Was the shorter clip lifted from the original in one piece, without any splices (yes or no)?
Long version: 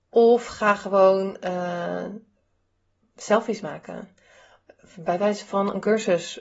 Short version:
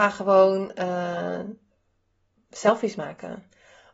yes